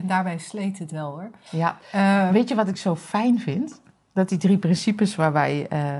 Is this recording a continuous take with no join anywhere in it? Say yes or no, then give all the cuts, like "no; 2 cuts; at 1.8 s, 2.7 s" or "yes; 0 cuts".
yes; 0 cuts